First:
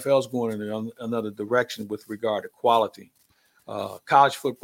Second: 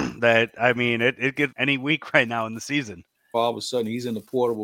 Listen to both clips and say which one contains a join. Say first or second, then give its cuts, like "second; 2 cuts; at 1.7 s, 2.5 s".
second; 2 cuts; at 1.5 s, 3.3 s